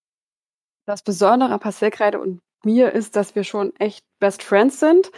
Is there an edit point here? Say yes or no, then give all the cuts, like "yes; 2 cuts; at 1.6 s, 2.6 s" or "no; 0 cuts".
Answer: no; 0 cuts